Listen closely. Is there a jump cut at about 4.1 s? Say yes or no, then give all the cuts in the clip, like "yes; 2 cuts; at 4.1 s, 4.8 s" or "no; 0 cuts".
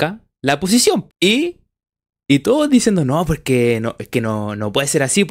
no; 1 cut; at 1.1 s